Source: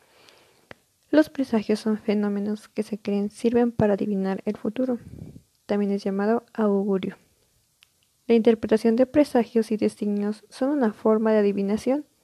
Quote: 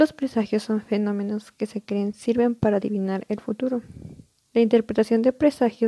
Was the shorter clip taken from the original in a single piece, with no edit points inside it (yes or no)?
no